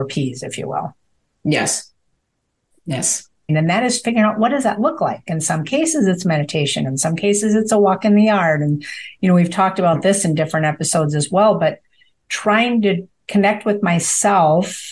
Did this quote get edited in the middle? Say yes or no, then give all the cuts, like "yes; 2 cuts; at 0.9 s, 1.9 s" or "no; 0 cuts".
yes; 1 cut; at 3.5 s